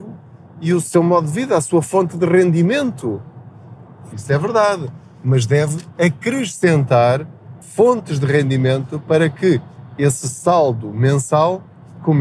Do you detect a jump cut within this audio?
yes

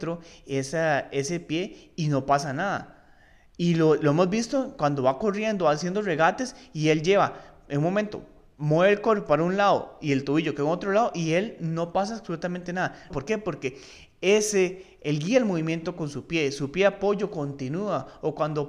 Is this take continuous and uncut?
no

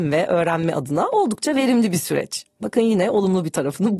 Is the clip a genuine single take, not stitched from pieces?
yes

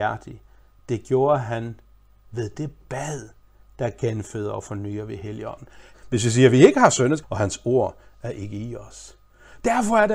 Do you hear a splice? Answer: yes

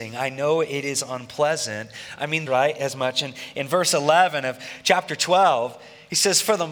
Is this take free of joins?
no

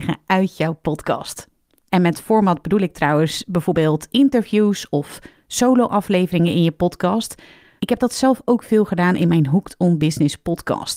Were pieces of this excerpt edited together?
yes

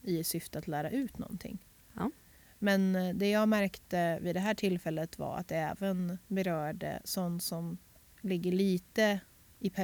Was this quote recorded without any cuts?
yes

